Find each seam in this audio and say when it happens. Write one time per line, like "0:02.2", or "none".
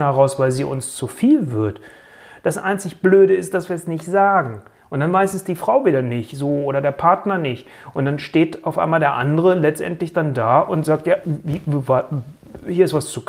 0:11.2

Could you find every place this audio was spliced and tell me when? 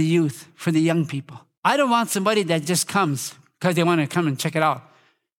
none

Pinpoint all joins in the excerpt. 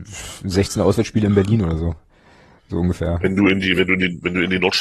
none

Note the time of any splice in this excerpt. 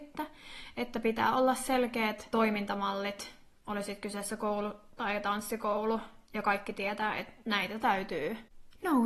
0:02.3

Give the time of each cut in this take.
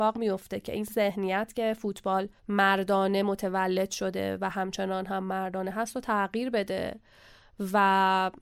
0:02.4

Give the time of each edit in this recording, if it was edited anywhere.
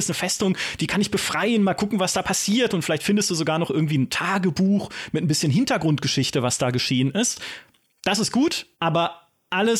0:08.7

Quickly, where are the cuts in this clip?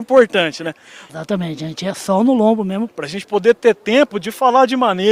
0:01.1
0:02.9

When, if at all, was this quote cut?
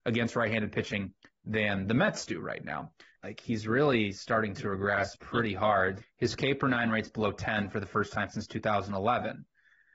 0:03.2
0:06.0

